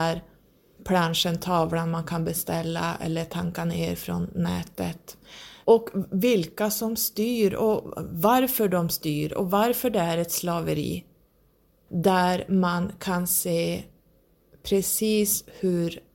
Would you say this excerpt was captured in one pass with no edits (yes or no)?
no